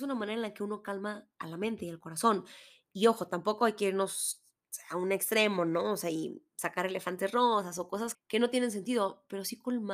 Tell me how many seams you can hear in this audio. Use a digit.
1